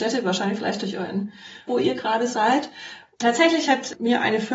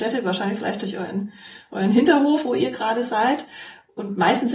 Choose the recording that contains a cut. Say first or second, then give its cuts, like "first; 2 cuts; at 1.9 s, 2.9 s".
first; 2 cuts; at 1.7 s, 3.1 s